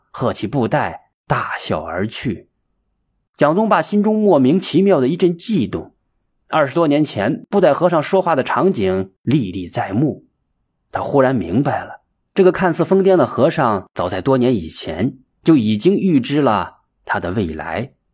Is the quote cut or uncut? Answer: uncut